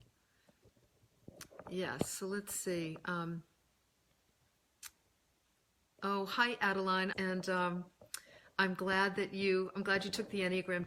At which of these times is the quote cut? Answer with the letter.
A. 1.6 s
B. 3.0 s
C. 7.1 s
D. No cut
C